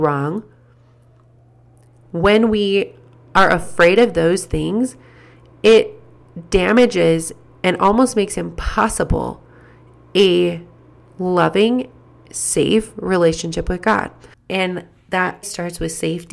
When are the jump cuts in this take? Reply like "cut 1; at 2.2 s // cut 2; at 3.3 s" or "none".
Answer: cut 1; at 14.3 s // cut 2; at 15.4 s